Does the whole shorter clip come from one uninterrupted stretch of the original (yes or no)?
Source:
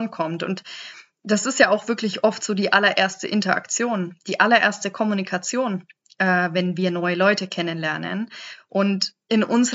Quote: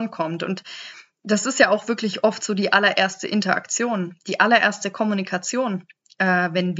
yes